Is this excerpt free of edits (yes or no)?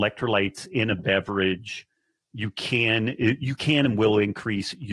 yes